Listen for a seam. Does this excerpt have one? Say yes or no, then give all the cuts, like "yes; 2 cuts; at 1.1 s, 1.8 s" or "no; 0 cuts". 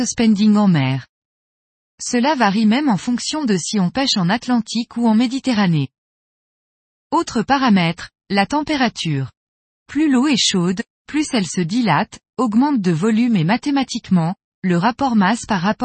no; 0 cuts